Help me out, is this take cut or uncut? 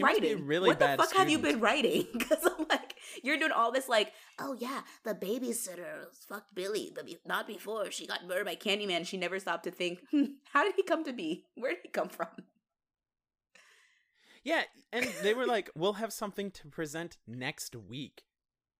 uncut